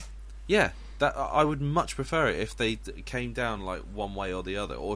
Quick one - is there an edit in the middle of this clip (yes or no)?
no